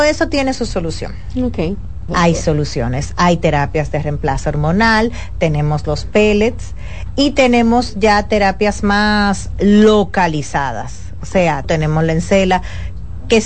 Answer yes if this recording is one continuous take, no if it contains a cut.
no